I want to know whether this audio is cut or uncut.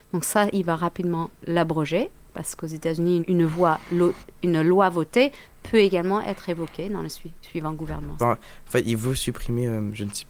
cut